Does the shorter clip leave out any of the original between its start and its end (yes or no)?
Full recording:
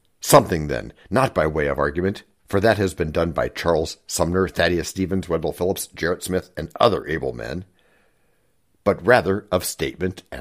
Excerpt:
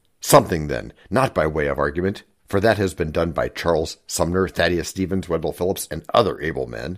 yes